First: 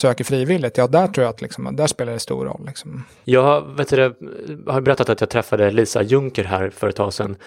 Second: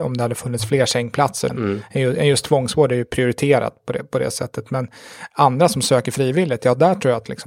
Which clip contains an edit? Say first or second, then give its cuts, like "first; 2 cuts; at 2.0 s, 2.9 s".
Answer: second; 1 cut; at 1.5 s